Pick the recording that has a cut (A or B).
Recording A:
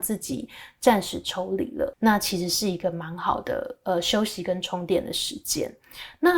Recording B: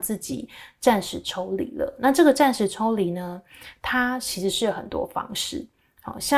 A